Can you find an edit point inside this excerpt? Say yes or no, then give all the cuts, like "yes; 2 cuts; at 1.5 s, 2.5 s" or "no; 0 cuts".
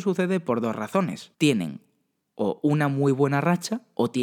yes; 1 cut; at 1.3 s